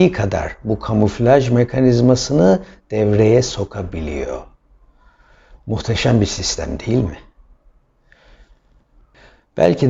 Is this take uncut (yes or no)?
yes